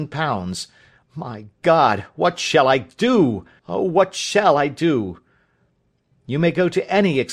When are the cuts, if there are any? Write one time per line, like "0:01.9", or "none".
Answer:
0:03.6
0:06.1